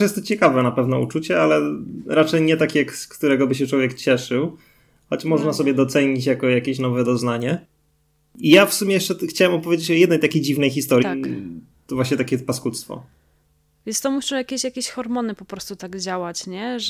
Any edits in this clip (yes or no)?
yes